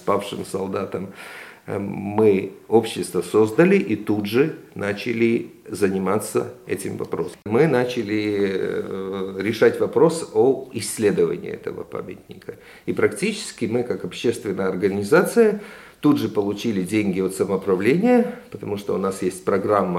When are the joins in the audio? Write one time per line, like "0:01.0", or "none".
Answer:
none